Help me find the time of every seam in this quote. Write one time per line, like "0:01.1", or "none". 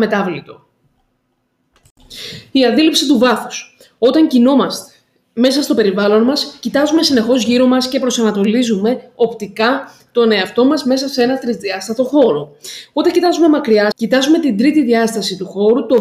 0:13.9